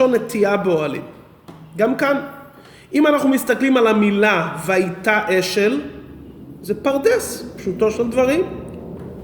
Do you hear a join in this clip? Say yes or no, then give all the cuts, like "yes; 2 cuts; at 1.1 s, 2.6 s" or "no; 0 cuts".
no; 0 cuts